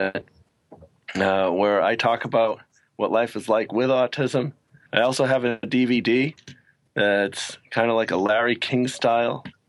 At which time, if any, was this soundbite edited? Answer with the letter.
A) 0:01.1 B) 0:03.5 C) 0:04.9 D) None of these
C